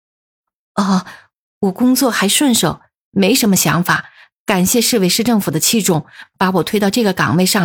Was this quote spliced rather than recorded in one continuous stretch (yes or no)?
no